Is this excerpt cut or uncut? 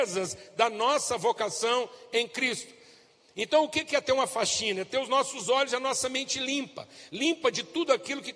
uncut